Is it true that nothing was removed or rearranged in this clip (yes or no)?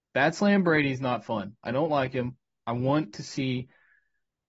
yes